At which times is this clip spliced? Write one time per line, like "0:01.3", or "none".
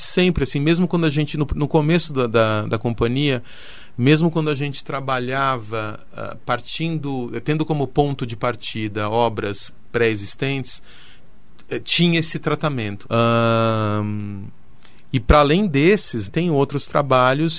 0:13.0
0:16.3

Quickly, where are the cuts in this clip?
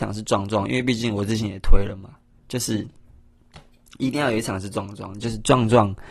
none

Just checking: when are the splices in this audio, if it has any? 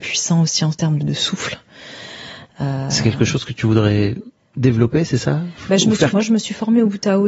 0:01.0
0:06.1

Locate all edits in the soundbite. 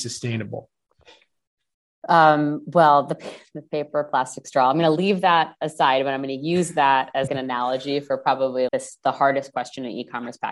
0:07.3
0:08.7

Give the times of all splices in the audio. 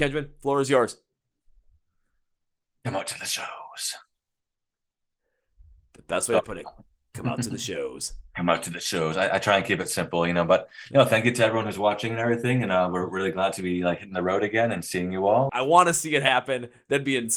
0:15.5

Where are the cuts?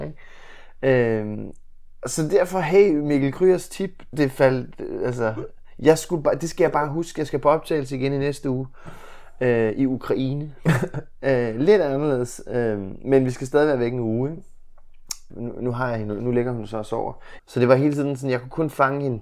0:04.1
0:15.3
0:17.4

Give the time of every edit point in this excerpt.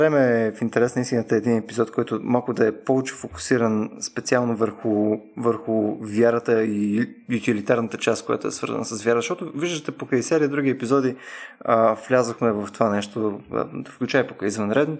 none

